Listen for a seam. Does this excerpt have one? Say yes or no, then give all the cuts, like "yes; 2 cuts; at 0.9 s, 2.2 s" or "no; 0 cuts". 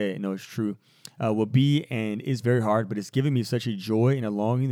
no; 0 cuts